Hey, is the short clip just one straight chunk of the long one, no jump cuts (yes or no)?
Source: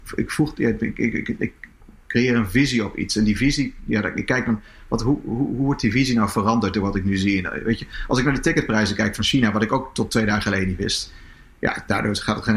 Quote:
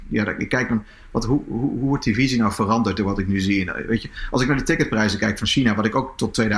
yes